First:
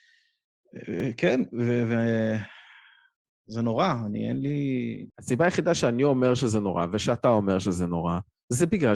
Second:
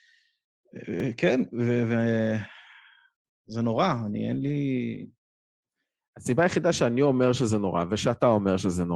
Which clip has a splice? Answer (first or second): first